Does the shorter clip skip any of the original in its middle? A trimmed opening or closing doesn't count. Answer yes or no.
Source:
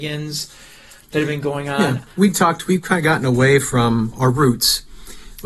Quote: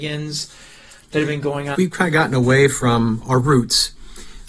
yes